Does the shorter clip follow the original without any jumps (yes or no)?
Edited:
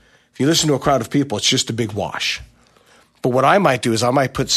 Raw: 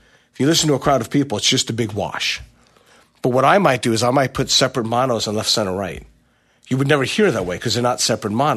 yes